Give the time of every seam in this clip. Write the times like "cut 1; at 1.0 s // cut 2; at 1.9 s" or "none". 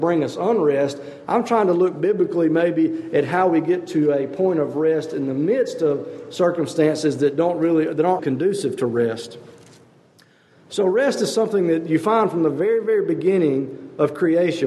cut 1; at 8.2 s